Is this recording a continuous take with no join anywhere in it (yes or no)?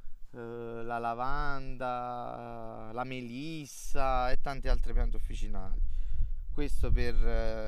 yes